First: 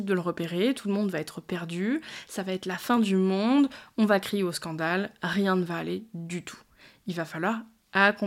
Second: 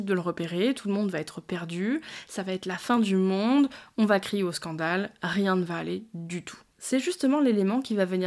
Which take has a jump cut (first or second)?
second